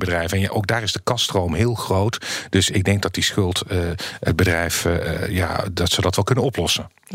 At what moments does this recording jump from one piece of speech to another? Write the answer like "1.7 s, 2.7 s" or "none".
none

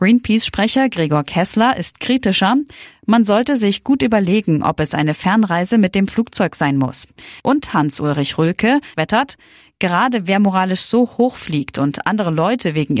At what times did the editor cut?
7.4 s, 8.9 s

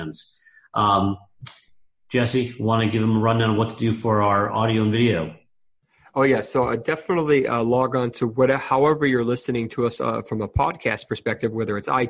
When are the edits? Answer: none

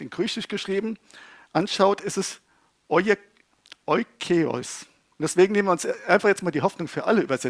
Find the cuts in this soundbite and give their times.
5.1 s

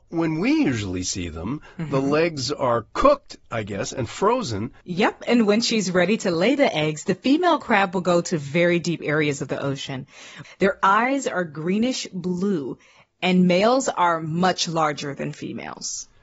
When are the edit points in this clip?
4.8 s, 10.4 s

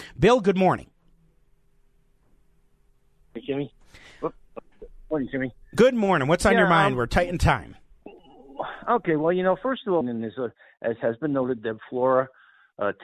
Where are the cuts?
10.0 s, 11.6 s

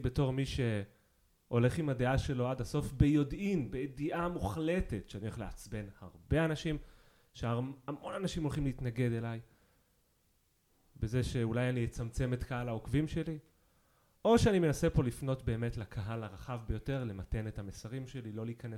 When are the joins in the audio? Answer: none

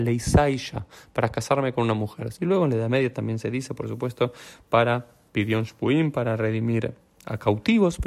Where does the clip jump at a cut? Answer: 2.3 s

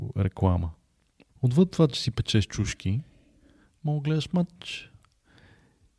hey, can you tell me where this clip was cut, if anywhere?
none

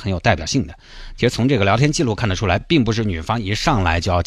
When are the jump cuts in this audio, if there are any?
none

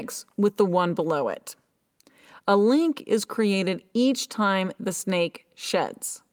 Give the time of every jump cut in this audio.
none

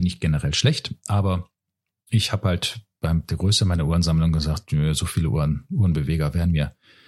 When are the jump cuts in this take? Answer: none

